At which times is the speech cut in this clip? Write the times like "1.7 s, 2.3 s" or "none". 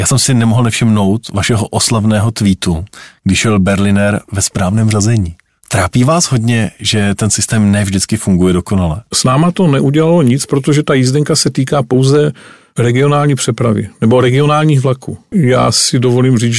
9.1 s, 15.3 s